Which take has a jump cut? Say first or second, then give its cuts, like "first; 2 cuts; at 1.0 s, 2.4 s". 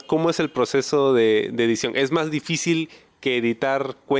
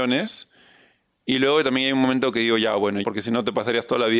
second; 1 cut; at 3.0 s